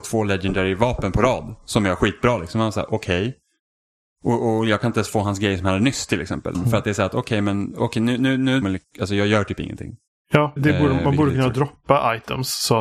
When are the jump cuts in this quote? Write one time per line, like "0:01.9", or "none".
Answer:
0:06.5
0:08.6
0:10.6